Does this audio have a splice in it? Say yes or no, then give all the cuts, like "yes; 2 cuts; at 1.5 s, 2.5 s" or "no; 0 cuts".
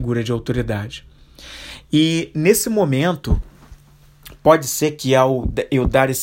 no; 0 cuts